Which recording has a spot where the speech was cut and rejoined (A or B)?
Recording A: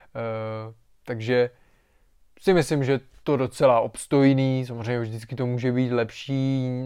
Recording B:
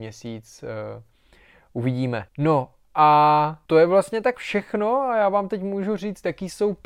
B